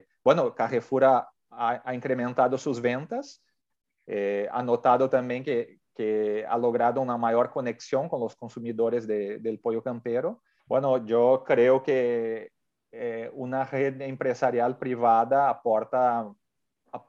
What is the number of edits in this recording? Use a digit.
1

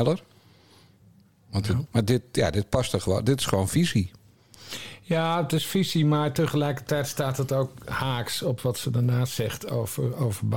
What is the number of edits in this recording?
1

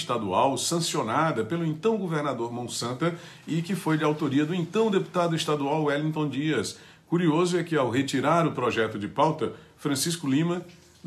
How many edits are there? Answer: 0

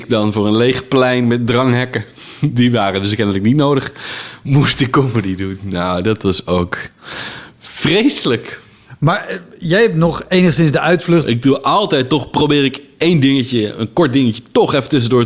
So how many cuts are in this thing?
1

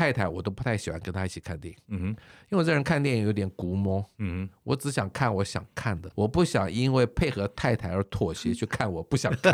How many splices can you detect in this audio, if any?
1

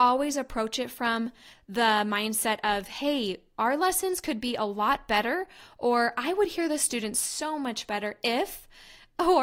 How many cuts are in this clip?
0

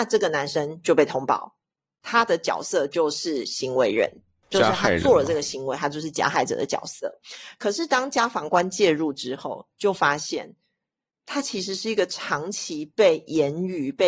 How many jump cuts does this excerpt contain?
0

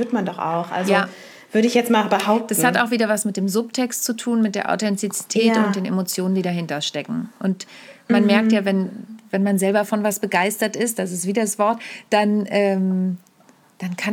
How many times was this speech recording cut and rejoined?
0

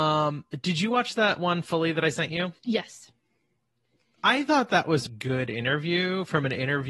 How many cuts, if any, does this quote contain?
2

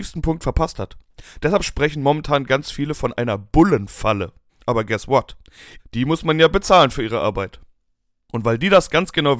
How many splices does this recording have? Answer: 2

